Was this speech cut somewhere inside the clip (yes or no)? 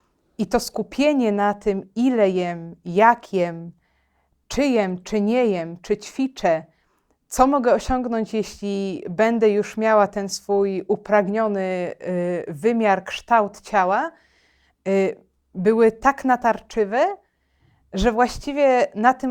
no